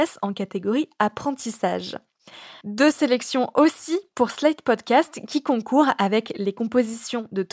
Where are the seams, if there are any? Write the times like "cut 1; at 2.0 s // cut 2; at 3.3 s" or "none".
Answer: cut 1; at 2.6 s